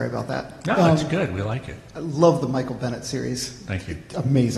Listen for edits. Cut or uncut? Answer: uncut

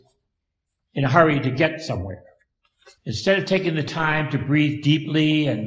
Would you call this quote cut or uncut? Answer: cut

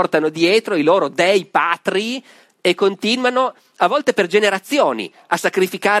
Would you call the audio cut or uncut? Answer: uncut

